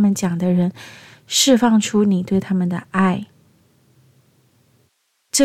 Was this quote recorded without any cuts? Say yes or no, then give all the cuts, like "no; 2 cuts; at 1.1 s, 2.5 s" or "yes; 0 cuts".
yes; 0 cuts